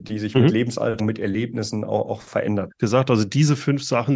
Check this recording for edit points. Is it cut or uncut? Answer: cut